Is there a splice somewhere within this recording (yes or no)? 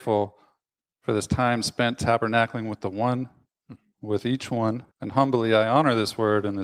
yes